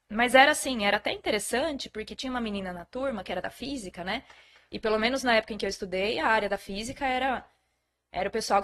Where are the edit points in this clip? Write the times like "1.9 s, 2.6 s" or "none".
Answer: none